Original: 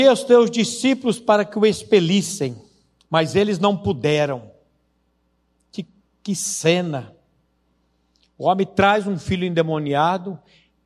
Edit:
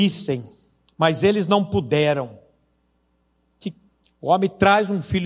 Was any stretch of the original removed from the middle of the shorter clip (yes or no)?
yes